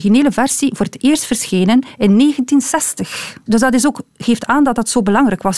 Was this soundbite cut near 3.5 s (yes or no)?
yes